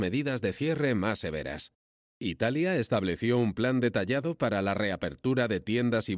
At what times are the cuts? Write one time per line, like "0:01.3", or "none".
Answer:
none